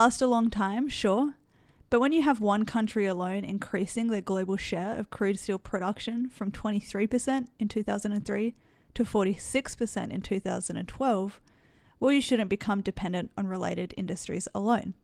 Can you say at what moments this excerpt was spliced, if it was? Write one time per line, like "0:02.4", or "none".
none